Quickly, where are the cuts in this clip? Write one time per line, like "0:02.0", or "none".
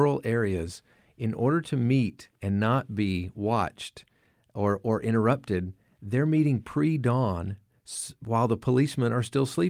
none